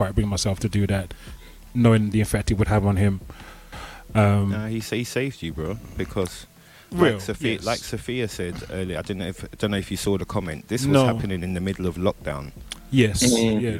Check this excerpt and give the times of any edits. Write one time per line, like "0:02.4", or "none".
none